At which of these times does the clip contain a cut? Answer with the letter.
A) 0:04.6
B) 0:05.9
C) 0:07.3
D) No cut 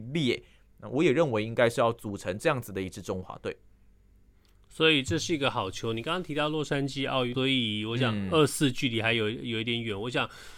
C